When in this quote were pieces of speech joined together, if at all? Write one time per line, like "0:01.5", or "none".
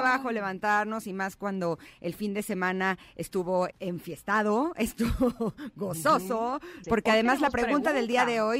0:03.7
0:06.8